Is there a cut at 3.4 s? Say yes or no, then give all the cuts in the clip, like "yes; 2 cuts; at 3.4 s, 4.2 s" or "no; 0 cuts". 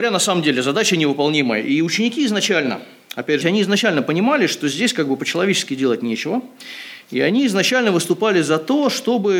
yes; 1 cut; at 3.4 s